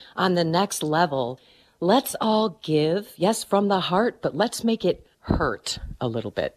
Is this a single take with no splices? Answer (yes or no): no